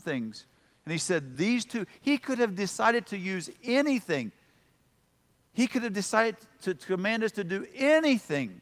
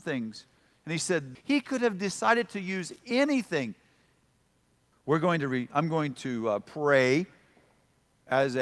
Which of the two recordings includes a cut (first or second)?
second